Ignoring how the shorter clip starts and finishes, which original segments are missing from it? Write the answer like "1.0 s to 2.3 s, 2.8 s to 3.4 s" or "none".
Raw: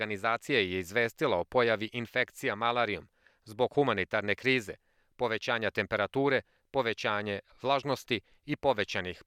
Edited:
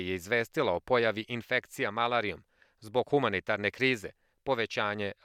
5.0 s to 6.6 s